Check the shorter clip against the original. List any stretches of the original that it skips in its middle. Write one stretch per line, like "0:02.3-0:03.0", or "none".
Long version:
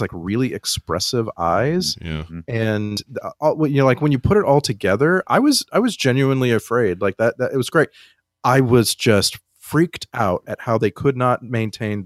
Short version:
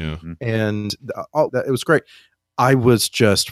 0:03.6-0:07.3